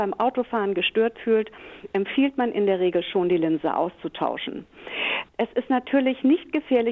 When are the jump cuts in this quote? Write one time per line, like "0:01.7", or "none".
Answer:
none